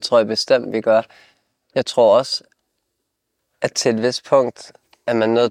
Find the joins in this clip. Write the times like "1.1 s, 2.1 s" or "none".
none